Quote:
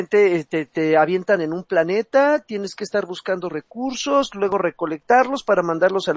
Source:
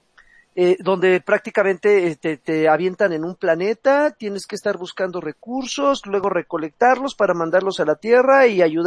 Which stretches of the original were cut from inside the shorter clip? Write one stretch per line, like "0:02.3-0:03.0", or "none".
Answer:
none